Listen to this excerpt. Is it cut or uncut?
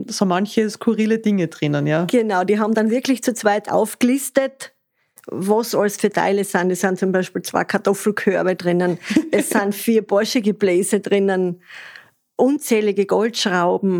uncut